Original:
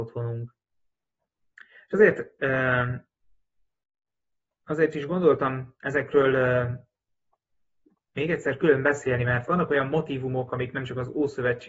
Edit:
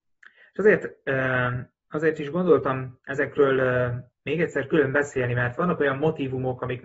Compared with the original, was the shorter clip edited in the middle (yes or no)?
yes